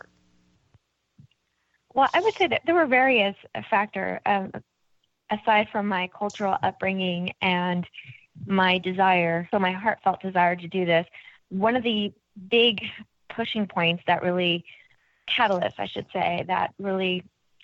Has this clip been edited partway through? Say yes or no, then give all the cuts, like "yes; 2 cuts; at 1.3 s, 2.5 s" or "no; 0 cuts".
yes; 1 cut; at 9.5 s